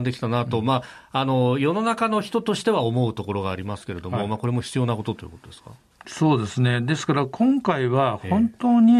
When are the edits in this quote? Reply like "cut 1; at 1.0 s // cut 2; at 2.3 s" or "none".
none